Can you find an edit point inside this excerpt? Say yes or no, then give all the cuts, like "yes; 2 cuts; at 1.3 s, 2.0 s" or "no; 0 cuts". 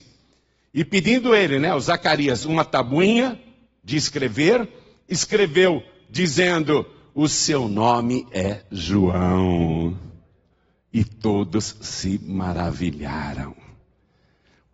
no; 0 cuts